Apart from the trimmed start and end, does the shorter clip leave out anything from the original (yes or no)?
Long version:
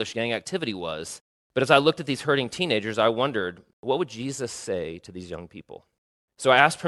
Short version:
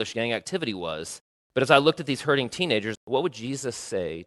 yes